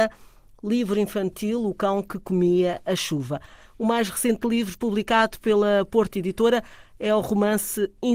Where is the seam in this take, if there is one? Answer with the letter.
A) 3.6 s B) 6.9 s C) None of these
C